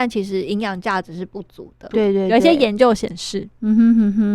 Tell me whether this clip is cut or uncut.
cut